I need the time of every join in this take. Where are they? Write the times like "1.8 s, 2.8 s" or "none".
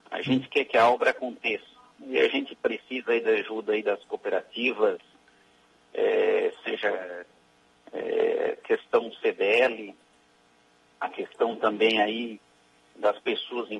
none